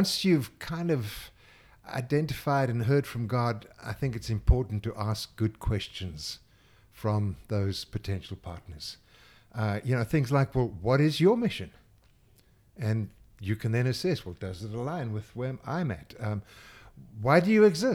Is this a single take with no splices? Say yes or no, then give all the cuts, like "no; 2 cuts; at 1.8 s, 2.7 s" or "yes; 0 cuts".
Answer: yes; 0 cuts